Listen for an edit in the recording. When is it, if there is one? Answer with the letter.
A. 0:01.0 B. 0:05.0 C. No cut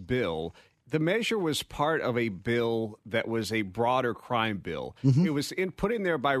C